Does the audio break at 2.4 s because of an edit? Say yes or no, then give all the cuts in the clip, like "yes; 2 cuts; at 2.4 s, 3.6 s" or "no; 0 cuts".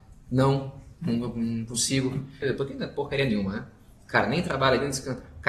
yes; 1 cut; at 2.4 s